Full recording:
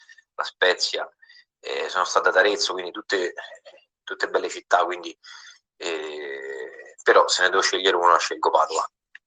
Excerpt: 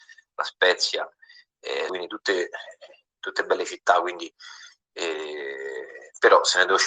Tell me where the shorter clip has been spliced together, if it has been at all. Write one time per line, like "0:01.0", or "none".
0:01.9